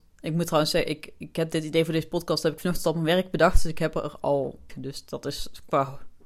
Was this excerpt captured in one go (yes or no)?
no